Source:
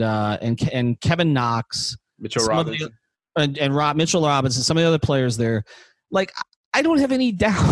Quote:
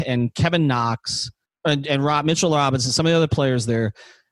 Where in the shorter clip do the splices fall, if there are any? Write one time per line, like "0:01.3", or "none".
0:01.5